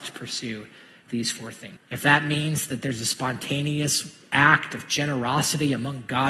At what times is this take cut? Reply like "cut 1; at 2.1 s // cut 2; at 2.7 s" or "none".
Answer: cut 1; at 1.8 s